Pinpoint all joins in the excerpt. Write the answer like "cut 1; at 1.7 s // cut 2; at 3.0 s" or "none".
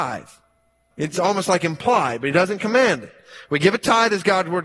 cut 1; at 0.9 s

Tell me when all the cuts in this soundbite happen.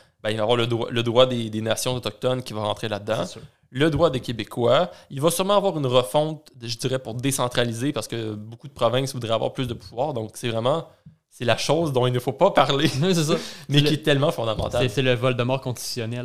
none

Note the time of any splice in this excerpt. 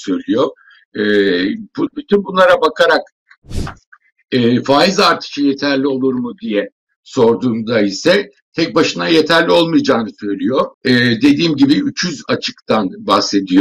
cut 1; at 1.9 s // cut 2; at 10.7 s

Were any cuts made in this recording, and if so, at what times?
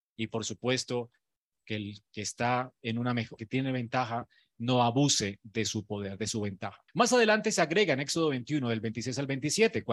cut 1; at 3.4 s // cut 2; at 6.9 s

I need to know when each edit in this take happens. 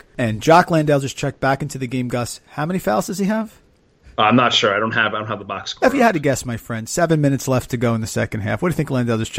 none

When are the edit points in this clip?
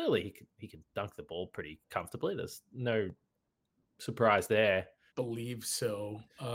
cut 1; at 5.1 s

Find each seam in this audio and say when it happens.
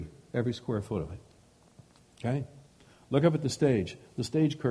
none

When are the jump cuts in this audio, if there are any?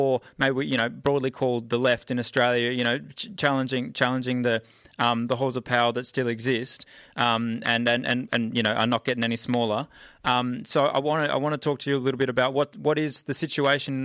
none

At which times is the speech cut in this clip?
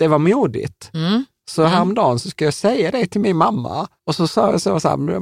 cut 1; at 4.0 s

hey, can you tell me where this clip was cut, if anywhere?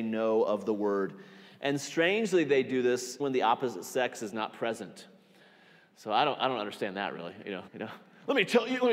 cut 1; at 3.2 s // cut 2; at 7.7 s

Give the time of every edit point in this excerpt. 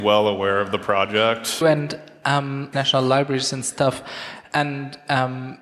cut 1; at 1.6 s // cut 2; at 2.7 s

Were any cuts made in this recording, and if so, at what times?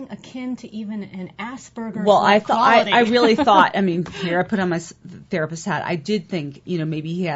none

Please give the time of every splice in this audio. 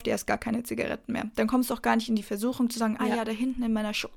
cut 1; at 3.0 s

